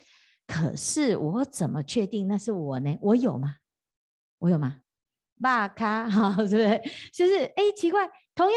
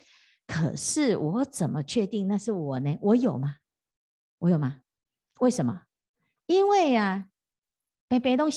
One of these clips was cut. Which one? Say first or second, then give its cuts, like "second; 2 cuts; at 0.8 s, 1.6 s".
first; 1 cut; at 5.3 s